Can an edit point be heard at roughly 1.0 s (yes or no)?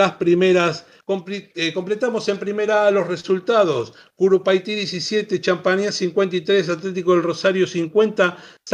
yes